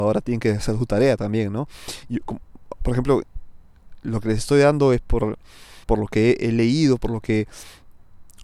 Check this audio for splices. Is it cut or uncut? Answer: cut